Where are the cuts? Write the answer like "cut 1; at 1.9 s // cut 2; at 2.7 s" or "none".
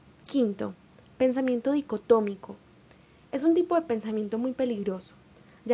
none

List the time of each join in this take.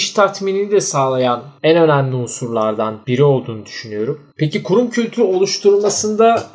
none

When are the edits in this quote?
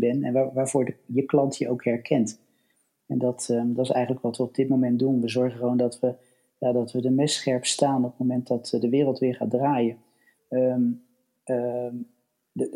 cut 1; at 10.4 s

